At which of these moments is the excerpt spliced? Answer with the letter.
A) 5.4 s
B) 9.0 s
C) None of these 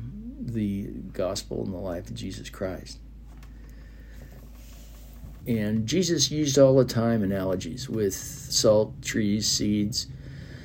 A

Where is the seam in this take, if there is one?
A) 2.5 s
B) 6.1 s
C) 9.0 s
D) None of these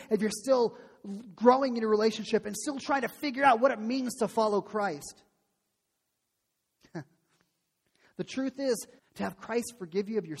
C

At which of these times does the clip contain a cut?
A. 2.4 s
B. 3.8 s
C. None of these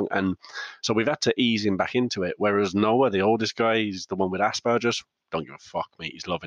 C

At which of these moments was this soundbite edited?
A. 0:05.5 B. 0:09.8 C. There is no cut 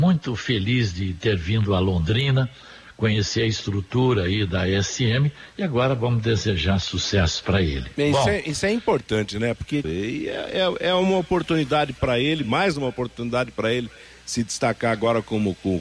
B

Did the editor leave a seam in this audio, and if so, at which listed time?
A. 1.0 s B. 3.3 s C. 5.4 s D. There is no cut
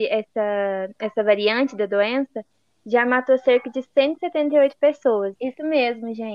C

